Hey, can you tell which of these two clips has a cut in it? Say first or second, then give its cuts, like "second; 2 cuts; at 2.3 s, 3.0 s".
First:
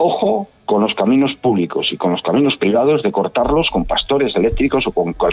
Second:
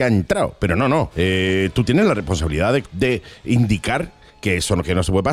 second; 2 cuts; at 1.1 s, 2.8 s